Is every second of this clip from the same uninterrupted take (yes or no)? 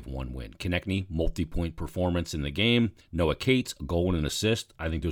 no